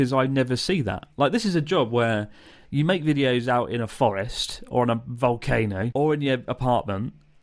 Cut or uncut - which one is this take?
cut